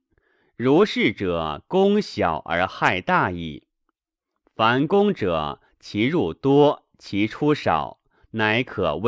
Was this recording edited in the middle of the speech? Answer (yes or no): no